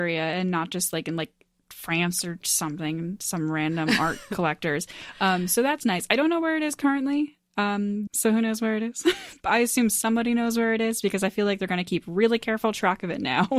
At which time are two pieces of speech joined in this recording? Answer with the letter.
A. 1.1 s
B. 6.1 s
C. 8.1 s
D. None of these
C